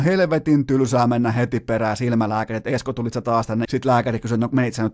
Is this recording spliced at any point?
yes; 1 cut; at 3.7 s

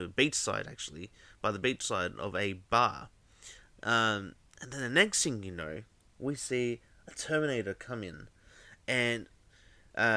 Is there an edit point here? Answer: no; 0 cuts

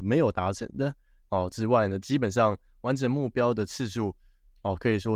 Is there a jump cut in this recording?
yes; 1 cut; at 1.2 s

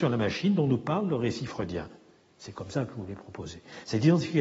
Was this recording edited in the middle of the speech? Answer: no; 0 cuts

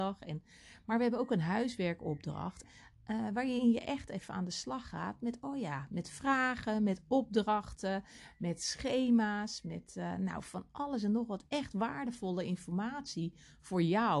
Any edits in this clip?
yes; 1 cut; at 2.6 s

